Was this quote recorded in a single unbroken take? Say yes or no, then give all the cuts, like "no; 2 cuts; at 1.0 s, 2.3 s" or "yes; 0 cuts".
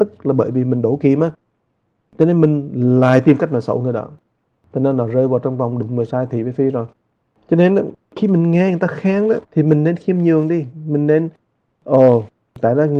no; 1 cut; at 9.4 s